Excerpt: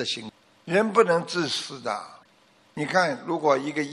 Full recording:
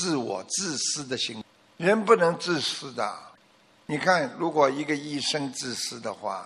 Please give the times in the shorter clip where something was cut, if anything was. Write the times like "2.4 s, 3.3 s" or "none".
none